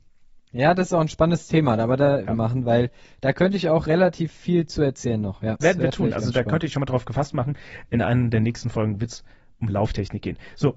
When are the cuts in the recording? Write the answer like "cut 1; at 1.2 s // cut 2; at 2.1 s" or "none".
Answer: cut 1; at 2.3 s // cut 2; at 5.6 s